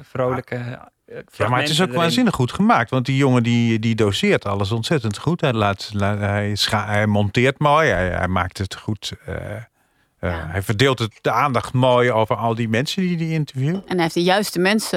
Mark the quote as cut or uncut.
uncut